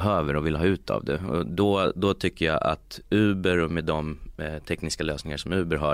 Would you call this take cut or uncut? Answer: uncut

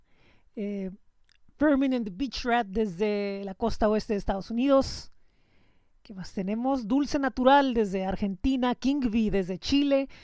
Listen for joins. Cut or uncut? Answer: uncut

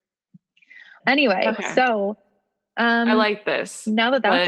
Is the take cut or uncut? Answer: cut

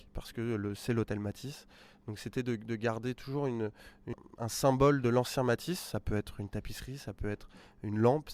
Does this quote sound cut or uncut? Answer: uncut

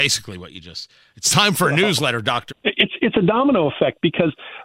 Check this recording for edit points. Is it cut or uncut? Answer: cut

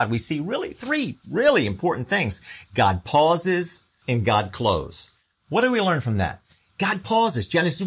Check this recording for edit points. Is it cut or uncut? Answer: cut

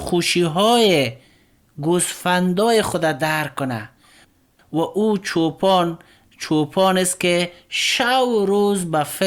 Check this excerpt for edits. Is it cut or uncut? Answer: uncut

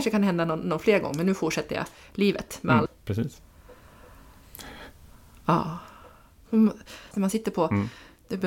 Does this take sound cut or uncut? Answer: cut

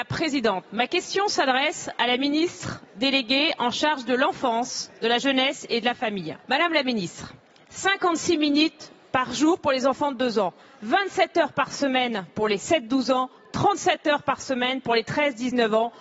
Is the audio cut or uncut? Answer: cut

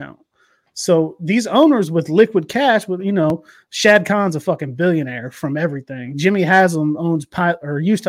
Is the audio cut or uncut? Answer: uncut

